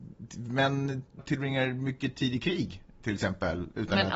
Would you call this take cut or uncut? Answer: cut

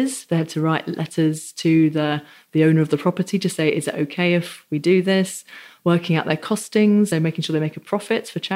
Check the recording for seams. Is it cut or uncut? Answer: cut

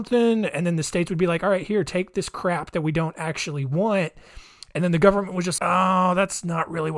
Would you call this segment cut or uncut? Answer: cut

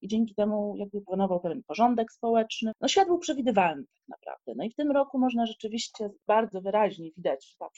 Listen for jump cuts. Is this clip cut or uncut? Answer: uncut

